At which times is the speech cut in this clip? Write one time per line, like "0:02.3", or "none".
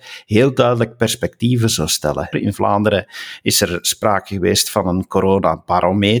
0:02.3